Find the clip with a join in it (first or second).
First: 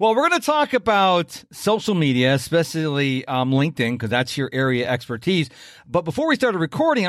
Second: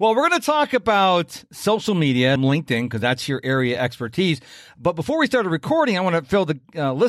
second